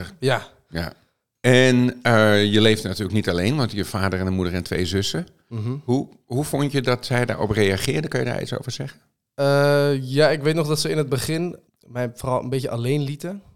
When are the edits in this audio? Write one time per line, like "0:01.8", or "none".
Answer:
none